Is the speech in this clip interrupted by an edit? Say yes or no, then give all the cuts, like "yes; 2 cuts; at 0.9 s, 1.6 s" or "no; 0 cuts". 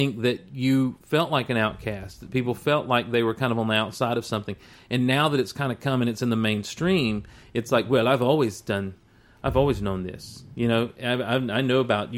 no; 0 cuts